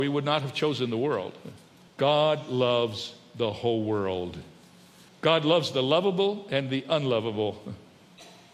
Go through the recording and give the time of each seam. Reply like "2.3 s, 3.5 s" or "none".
1.9 s, 5.1 s

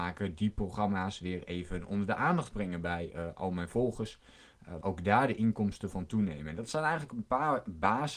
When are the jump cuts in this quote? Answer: 4.8 s

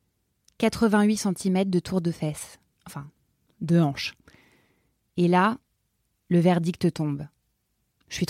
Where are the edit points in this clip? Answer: 5.1 s

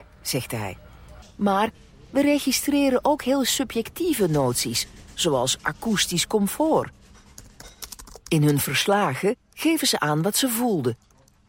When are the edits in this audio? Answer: 1.2 s

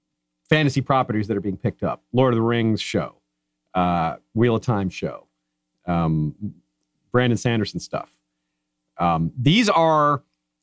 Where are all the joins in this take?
none

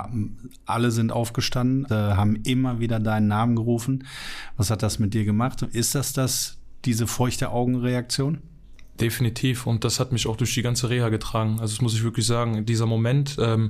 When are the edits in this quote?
1.9 s

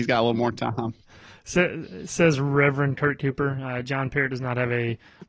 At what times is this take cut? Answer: none

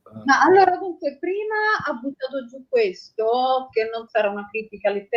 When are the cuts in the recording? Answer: 4.1 s

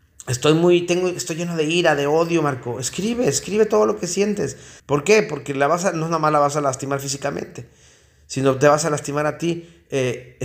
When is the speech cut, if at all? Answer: 4.8 s

